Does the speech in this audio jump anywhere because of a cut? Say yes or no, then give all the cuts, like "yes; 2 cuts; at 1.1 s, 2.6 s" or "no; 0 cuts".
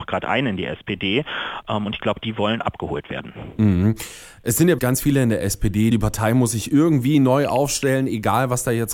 yes; 2 cuts; at 4.8 s, 5.9 s